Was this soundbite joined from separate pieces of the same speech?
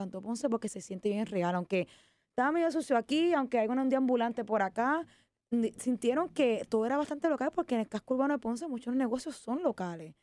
no; 0 cuts

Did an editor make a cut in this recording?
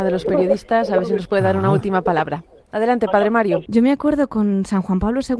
yes; 2 cuts; at 2.6 s, 3.7 s

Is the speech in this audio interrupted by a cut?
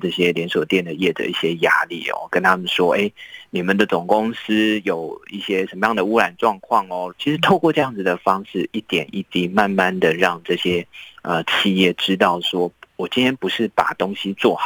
yes; 1 cut; at 7.1 s

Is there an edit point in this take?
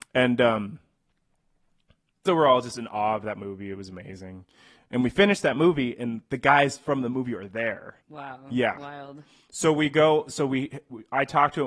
yes; 1 cut; at 8.0 s

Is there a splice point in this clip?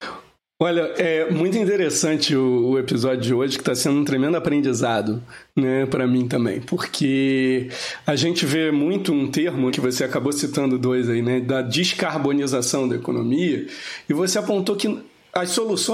yes; 1 cut; at 9.7 s

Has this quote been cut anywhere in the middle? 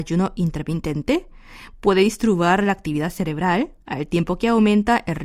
yes; 1 cut; at 3.8 s

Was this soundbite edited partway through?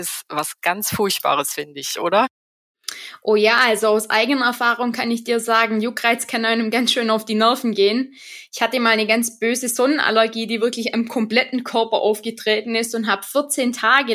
no; 0 cuts

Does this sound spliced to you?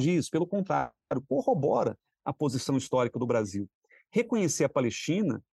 no; 0 cuts

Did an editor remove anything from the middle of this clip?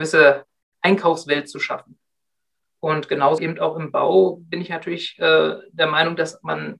yes; 1 cut; at 3.4 s

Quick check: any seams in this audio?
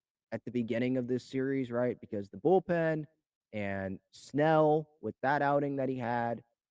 no; 0 cuts

